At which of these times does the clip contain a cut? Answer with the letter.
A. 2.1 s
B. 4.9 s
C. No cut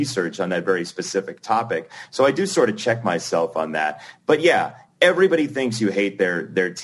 C